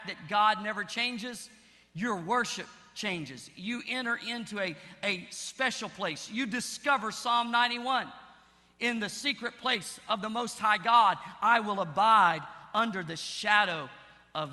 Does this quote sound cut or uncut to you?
uncut